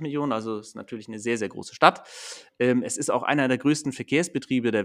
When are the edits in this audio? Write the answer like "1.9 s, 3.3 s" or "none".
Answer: none